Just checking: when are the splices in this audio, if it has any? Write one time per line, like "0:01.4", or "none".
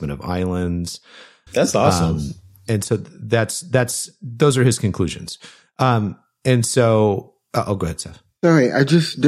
0:01.5